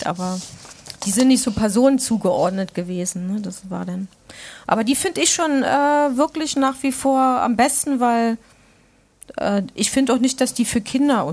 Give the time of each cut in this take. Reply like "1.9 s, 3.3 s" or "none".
none